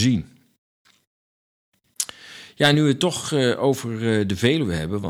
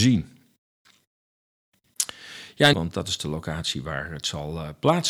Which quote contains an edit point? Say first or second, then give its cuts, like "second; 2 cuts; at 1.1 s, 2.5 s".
second; 1 cut; at 2.7 s